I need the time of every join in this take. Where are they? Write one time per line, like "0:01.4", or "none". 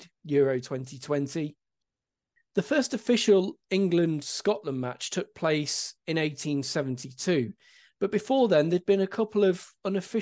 none